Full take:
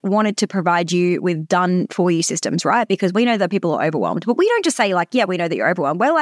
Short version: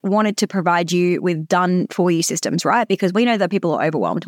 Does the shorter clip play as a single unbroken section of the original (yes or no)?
yes